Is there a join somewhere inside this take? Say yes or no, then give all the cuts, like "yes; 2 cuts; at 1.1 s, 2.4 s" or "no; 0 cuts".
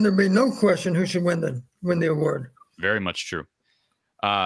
no; 0 cuts